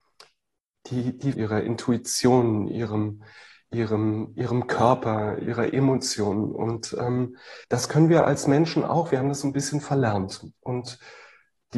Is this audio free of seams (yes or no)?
no